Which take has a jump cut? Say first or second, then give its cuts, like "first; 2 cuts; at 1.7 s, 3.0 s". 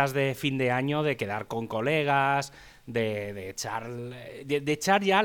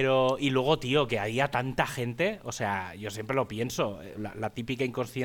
second; 1 cut; at 4.1 s